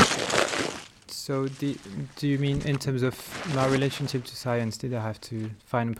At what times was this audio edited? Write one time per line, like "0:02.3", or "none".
none